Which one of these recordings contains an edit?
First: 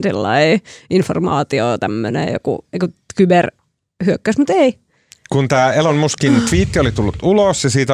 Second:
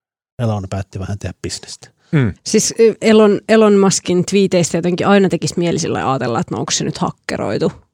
second; 1 cut; at 2.4 s

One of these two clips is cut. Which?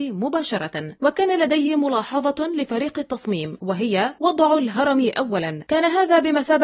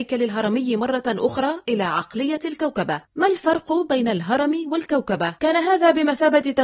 second; 1 cut; at 5.4 s

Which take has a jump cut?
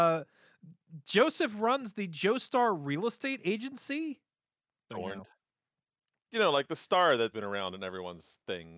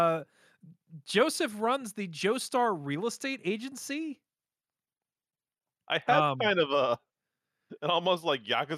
first; 2 cuts; at 4.9 s, 7.3 s

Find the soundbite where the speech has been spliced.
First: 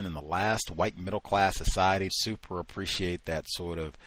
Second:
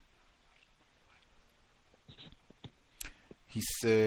first; 1 cut; at 2.1 s

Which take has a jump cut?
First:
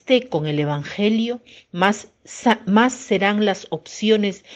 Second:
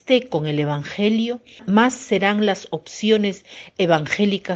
second; 1 cut; at 1.6 s

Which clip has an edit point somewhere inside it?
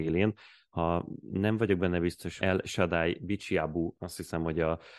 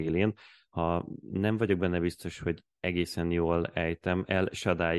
first; 2 cuts; at 2.4 s, 3.9 s

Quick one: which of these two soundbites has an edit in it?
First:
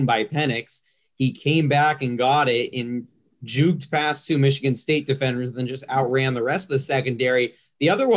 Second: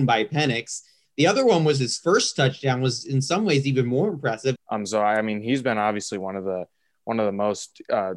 second; 2 cuts; at 1.0 s, 4.6 s

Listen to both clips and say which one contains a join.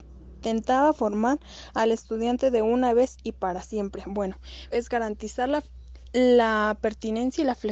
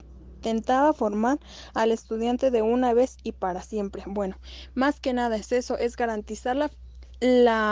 first; 1 cut; at 4.7 s

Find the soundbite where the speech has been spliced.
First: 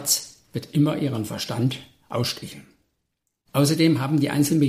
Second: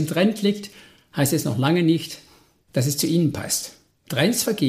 first; 1 cut; at 3.4 s

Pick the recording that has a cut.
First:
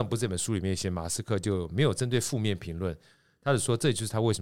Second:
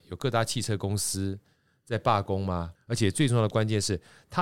second; 1 cut; at 2.8 s

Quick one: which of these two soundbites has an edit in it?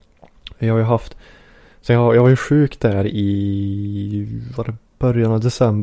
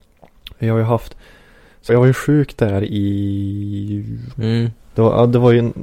second; 2 cuts; at 1.9 s, 4.3 s

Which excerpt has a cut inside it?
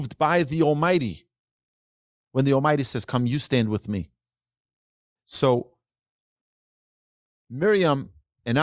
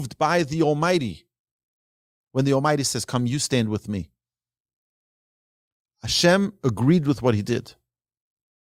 first; 1 cut; at 5.2 s

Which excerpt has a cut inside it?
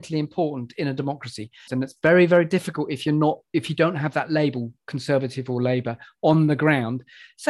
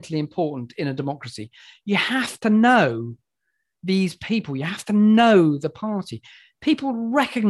first; 1 cut; at 1.7 s

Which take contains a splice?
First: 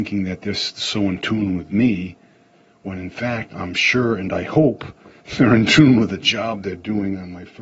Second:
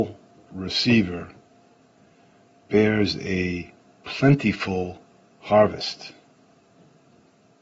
first; 1 cut; at 3.5 s

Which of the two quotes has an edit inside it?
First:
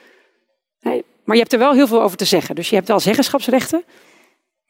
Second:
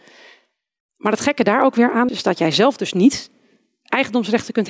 second; 1 cut; at 2.1 s

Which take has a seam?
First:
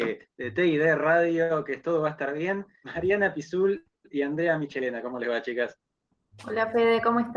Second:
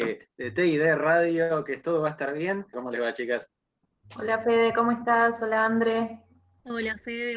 second; 1 cut; at 2.7 s

